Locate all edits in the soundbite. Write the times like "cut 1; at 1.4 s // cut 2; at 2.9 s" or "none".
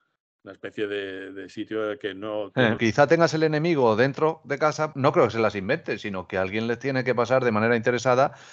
cut 1; at 2.8 s // cut 2; at 4.9 s